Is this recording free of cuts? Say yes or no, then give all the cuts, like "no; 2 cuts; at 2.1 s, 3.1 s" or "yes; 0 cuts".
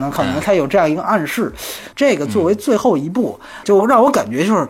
no; 2 cuts; at 1.9 s, 3.6 s